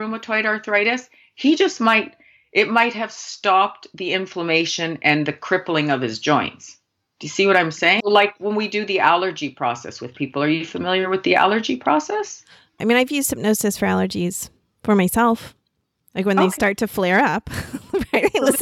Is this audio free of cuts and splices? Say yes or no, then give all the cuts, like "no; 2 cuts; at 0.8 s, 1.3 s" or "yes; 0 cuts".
no; 2 cuts; at 8.0 s, 12.8 s